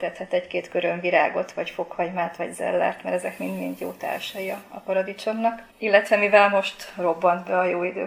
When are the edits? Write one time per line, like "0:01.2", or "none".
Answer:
0:05.7